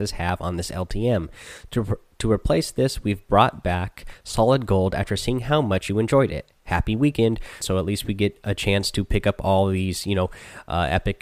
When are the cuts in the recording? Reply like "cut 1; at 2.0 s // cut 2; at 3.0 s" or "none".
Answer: cut 1; at 7.6 s